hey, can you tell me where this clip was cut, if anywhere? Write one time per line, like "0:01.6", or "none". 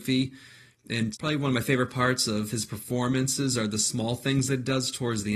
0:01.1